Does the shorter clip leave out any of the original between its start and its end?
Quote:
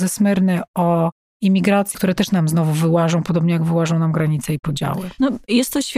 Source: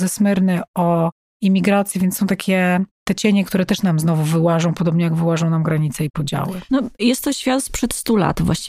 yes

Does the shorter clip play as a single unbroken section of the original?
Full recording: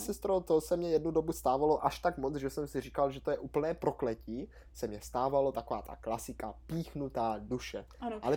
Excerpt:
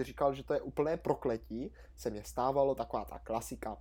yes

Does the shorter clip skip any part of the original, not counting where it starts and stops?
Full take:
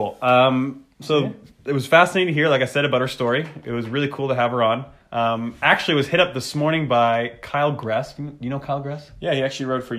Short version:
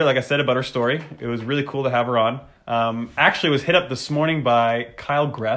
no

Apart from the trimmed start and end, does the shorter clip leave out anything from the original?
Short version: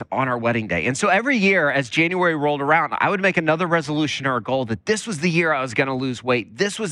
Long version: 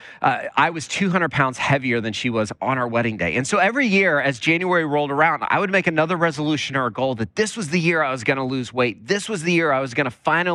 no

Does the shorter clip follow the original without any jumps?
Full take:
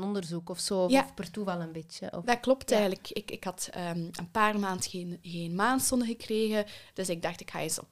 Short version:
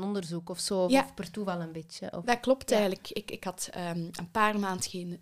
yes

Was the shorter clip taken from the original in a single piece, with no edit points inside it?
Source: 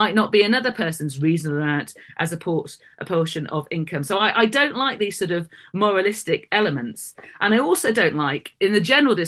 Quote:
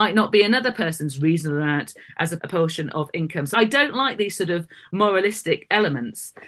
no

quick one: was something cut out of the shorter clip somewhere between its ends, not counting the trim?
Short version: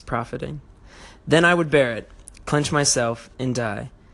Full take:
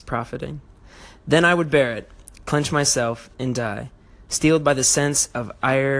no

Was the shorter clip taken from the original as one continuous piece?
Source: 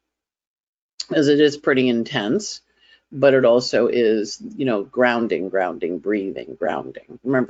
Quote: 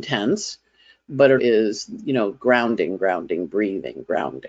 no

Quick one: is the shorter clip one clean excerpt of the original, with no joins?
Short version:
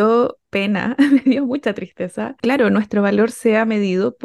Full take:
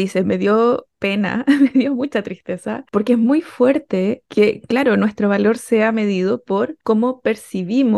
no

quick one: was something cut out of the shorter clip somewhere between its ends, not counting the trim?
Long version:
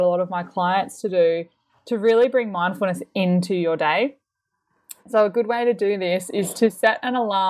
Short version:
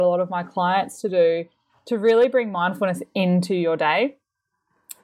no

